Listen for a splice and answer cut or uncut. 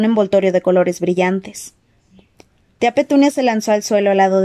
uncut